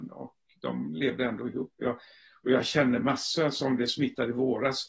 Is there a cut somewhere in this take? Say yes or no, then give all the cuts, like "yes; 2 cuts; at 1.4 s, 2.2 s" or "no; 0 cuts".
no; 0 cuts